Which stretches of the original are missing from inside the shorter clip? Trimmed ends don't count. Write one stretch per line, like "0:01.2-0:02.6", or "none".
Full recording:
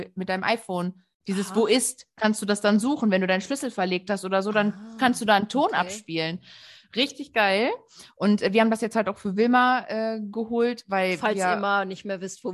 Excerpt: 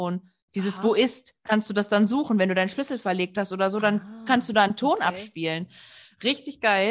none

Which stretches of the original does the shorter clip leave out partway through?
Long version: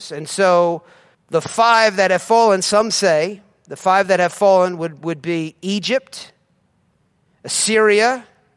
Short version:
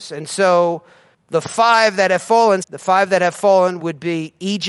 0:02.6-0:03.6
0:04.8-0:05.0

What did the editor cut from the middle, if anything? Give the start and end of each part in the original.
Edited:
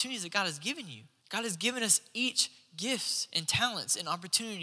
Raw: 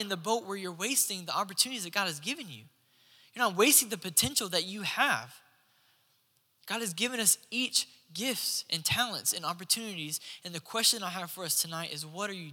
0:02.8-0:06.6

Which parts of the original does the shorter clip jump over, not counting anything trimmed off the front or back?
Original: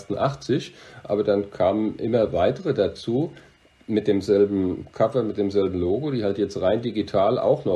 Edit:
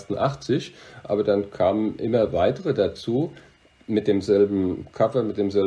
none

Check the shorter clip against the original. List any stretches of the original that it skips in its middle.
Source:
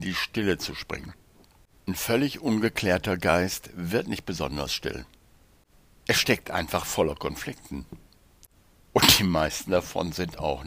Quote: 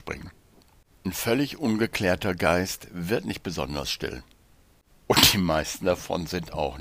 0:05.8-0:08.8

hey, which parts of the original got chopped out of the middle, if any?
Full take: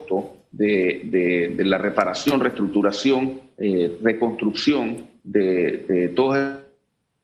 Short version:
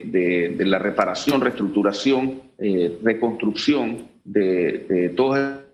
none

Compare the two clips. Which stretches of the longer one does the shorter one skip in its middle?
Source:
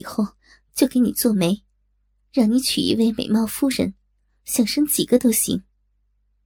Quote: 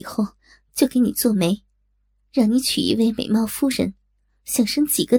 none

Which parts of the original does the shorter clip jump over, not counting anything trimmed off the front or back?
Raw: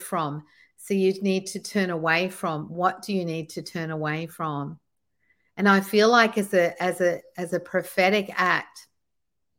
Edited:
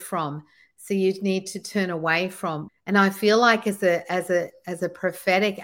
0:02.7-0:05.4

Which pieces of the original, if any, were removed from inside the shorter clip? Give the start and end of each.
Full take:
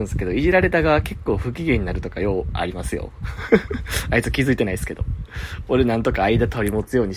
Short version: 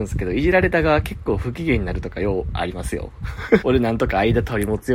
0:03.6-0:05.7

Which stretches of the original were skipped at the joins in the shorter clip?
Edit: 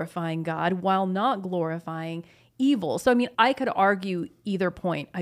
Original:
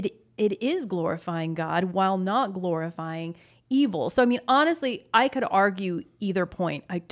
0:04.5-0:05.1

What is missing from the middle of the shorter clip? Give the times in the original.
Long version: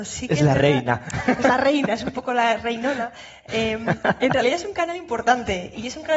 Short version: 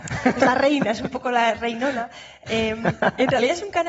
none

